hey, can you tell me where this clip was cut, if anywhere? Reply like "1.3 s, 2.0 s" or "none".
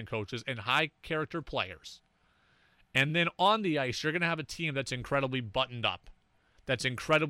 none